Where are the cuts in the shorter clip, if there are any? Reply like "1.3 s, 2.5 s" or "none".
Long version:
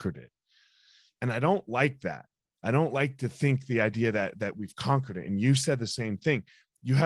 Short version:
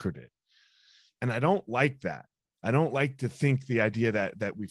none

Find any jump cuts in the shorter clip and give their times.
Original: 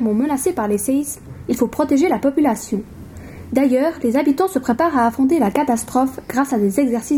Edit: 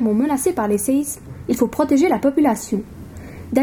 none

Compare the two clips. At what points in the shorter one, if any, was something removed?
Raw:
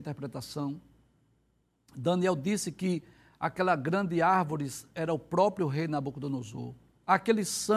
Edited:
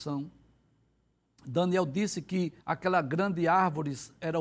2.6 s

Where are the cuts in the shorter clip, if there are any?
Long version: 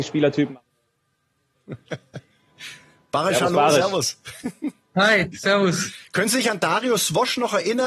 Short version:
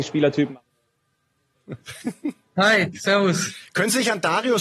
1.8 s

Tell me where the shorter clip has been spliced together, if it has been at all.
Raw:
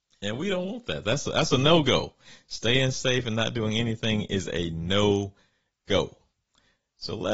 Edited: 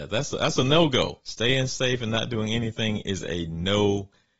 1.2 s

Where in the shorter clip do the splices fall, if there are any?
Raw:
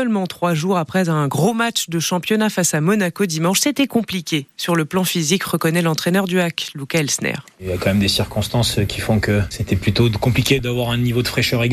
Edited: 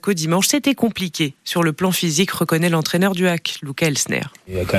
none

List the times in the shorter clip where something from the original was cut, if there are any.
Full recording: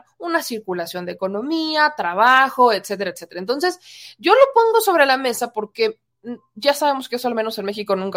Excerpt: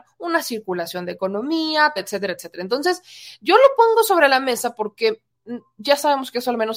2.0 s

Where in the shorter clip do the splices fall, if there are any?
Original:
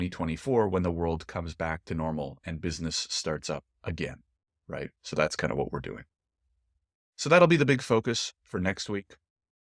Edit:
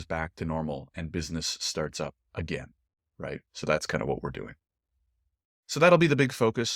none

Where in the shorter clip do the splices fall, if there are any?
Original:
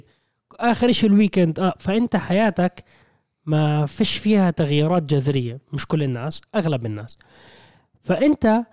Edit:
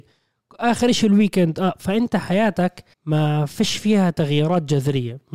2.9 s

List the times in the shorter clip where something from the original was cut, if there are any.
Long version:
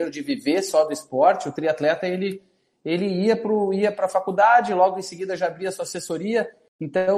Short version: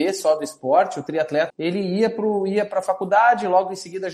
1.5 s

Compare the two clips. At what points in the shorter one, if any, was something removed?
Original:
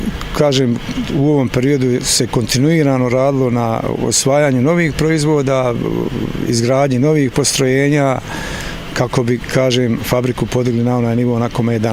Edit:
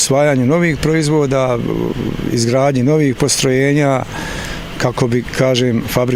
none

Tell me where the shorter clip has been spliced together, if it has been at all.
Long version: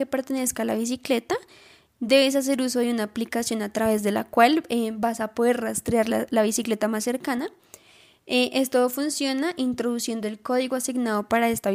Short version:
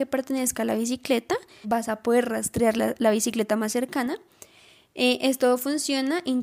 1.6 s

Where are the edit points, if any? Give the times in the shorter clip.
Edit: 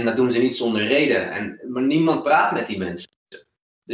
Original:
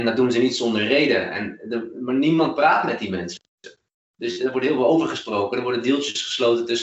1.6 s

